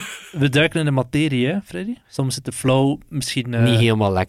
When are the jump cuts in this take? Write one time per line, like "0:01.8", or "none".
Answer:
0:02.0